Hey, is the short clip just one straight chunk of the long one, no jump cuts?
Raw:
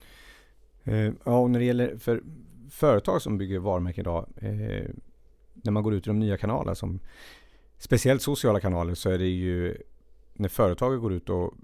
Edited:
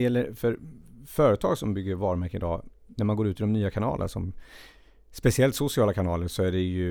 no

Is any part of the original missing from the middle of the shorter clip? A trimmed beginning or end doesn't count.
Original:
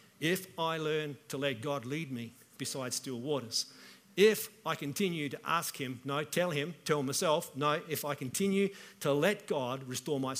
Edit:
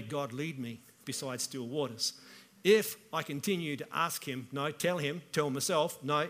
no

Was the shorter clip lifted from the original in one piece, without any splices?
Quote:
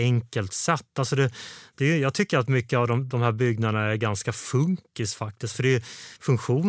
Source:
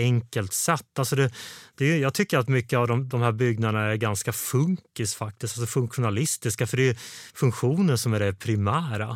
no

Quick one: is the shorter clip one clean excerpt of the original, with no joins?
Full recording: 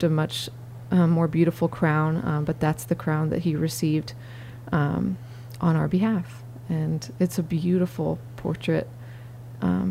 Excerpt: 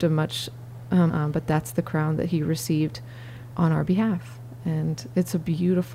no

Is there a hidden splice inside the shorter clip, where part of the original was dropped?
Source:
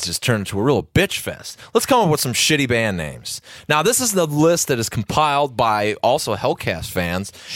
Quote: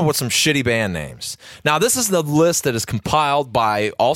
no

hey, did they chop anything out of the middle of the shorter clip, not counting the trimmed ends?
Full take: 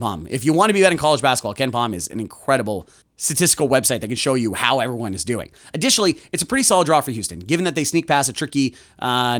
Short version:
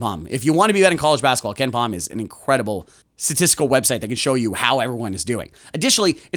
no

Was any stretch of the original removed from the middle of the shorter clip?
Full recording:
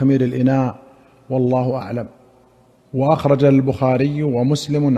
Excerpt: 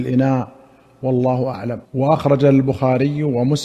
yes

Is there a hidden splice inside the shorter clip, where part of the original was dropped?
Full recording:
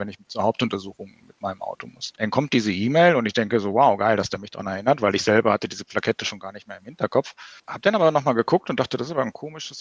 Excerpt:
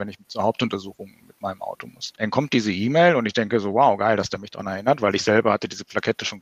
no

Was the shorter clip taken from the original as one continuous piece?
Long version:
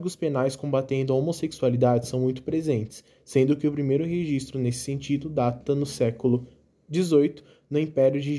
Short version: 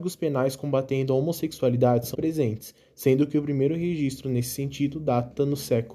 no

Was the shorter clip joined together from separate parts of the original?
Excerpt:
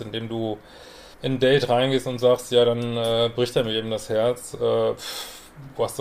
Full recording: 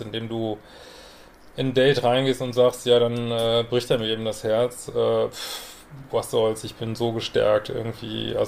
yes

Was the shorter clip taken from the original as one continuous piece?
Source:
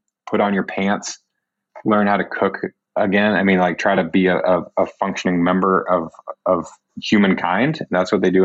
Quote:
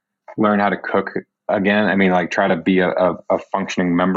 yes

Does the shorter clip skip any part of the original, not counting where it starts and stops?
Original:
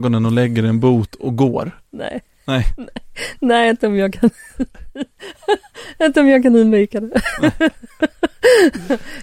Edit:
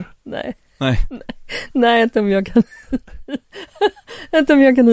no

